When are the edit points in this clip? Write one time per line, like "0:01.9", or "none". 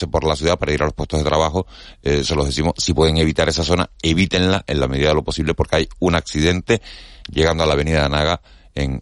none